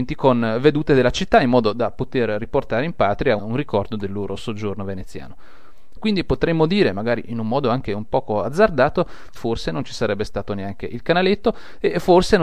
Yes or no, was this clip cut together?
yes